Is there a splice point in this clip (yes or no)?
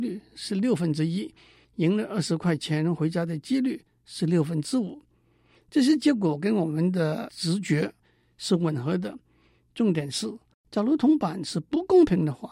yes